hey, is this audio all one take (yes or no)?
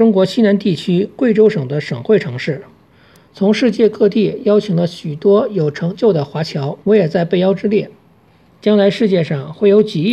no